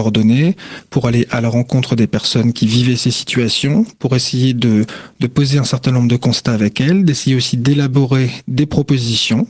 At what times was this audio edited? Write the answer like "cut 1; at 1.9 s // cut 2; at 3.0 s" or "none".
none